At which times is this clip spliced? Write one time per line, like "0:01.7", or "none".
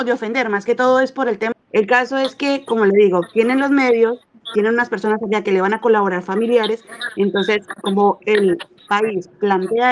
0:01.5

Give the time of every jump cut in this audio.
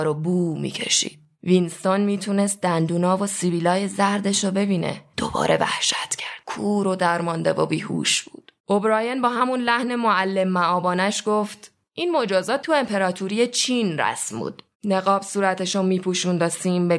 0:08.6
0:14.7

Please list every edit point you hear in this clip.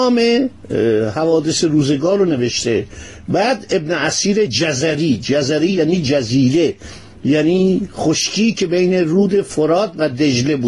none

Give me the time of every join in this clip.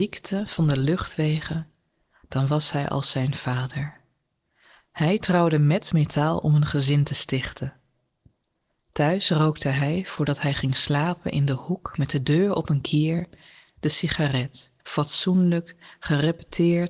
0:14.8

